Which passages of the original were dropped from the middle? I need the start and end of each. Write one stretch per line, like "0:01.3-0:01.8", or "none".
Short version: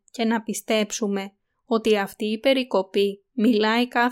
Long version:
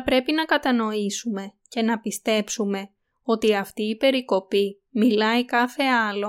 none